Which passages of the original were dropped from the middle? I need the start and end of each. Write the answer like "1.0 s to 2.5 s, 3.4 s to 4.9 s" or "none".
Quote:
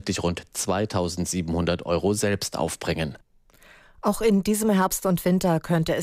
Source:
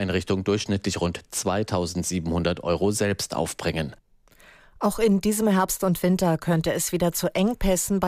none

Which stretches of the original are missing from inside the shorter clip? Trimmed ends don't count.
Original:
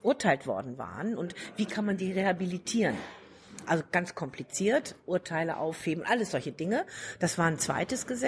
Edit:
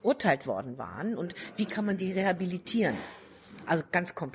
none

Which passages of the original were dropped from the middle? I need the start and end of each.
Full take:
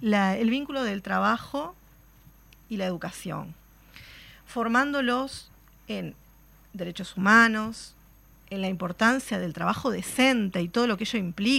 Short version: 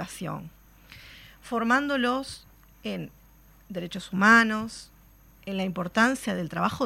none

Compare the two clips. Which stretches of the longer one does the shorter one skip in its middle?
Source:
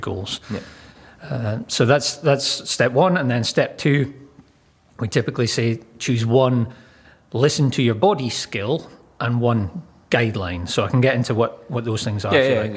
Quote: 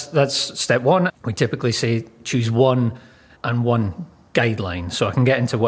3.2 s to 4.8 s, 7.1 s to 9.1 s

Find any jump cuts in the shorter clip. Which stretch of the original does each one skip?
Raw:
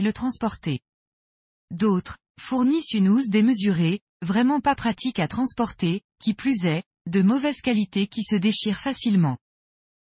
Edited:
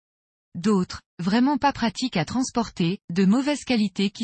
2.2 s to 4.1 s, 6.1 s to 7.0 s

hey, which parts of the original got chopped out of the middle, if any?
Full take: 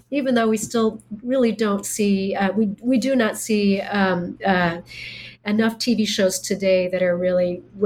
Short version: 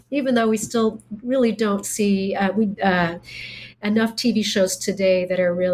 2.8 s to 4.4 s

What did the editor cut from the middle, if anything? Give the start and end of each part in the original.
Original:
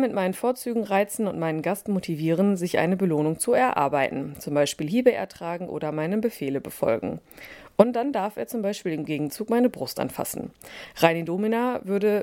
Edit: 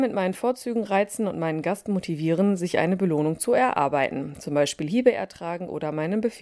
none

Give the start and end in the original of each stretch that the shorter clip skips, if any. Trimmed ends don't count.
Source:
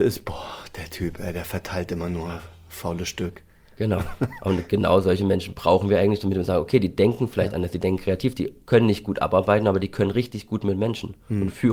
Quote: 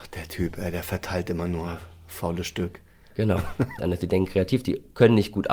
4.4 s to 7.5 s

